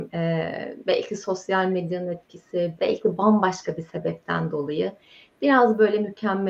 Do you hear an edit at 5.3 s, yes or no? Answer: no